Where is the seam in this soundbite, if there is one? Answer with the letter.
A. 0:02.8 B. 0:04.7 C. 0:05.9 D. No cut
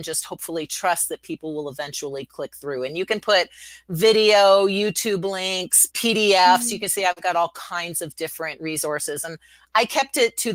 C